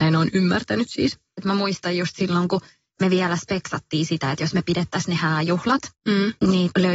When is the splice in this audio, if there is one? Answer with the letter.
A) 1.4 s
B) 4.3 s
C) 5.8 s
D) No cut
A